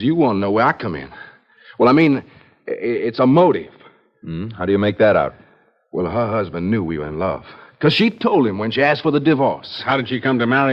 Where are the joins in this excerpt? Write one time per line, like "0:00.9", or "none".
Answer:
none